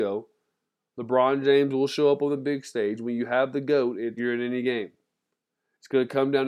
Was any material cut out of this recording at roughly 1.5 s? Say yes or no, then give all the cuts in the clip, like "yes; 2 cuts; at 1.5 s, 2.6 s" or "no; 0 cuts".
no; 1 cut; at 4.2 s